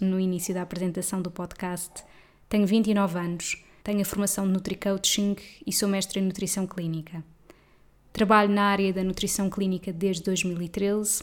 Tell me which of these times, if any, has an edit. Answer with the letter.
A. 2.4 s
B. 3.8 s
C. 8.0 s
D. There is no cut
B